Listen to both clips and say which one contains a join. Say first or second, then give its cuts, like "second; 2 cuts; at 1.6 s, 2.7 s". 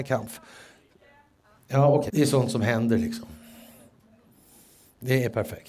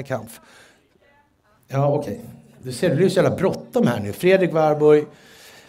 first; 1 cut; at 2.1 s